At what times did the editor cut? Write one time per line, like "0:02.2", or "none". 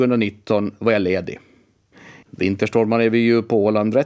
0:02.2